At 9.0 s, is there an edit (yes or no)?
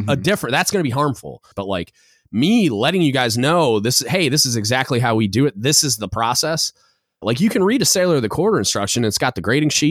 no